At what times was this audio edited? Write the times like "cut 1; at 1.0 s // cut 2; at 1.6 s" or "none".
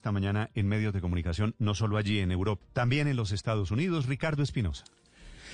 cut 1; at 2.6 s